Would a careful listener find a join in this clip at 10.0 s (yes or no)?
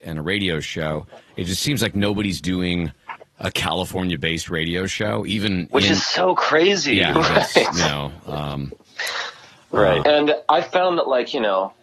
yes